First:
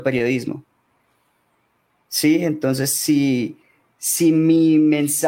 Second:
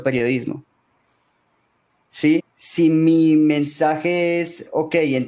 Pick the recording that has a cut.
second; 1 cut; at 2.4 s

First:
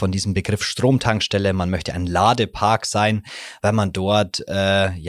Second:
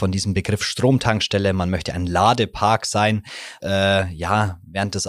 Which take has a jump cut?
second; 1 cut; at 3.6 s

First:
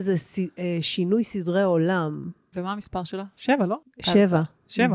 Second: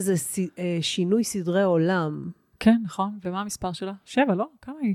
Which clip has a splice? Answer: first; 2 cuts; at 2.5 s, 3.8 s

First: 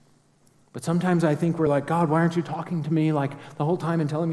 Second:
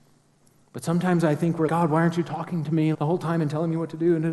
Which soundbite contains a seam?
second; 2 cuts; at 1.7 s, 2.9 s

